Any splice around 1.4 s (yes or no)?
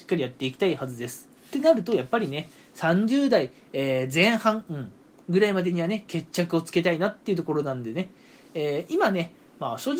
yes